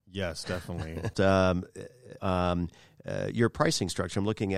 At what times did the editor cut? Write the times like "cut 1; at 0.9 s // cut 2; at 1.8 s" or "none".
cut 1; at 1.1 s // cut 2; at 2.2 s